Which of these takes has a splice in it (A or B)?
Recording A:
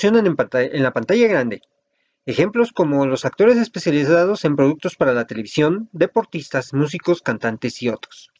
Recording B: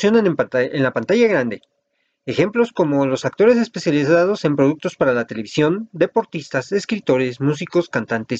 A